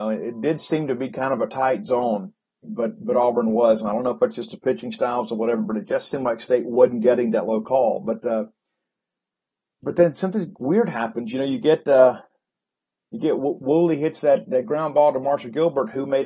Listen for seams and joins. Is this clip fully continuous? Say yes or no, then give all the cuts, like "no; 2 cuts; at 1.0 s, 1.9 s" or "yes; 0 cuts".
no; 1 cut; at 2.6 s